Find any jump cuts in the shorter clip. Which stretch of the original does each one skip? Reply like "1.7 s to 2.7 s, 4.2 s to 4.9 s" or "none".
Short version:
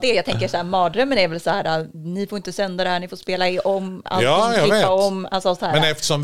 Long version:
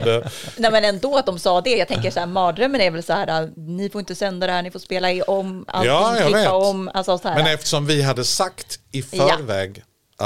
none